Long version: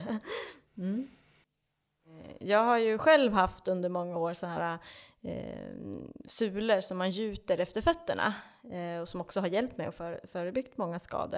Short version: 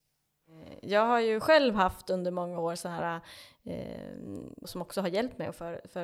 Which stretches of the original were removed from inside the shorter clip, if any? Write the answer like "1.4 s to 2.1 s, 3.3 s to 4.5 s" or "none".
6.2 s to 9.0 s